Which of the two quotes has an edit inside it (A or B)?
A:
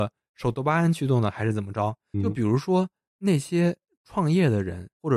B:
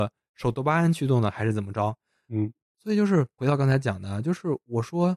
A